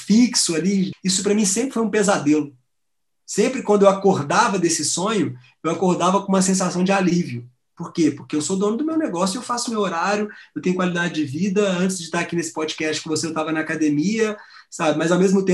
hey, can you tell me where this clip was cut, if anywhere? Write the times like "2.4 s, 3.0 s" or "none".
0.9 s